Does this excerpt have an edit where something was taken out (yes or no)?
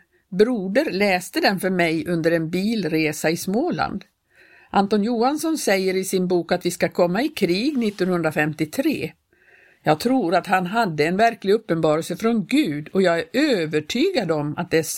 no